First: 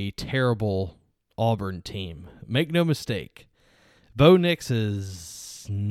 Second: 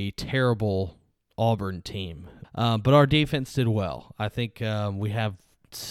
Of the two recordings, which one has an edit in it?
second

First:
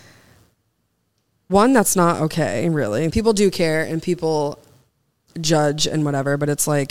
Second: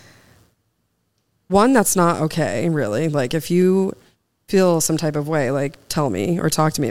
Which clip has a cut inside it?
first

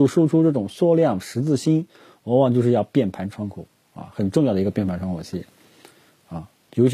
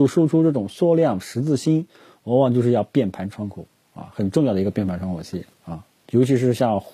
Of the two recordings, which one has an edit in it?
second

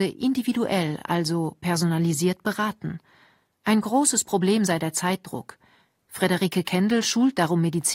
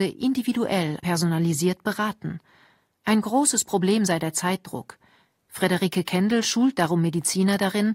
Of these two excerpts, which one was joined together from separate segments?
second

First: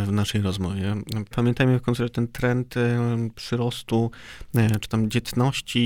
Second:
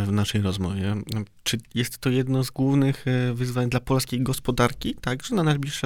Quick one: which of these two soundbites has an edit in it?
first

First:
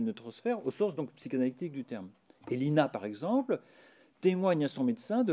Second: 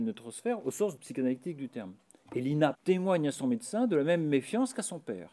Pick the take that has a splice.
second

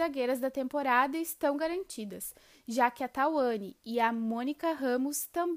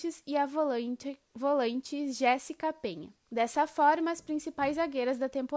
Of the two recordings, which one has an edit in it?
second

